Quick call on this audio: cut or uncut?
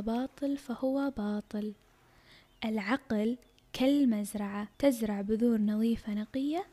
cut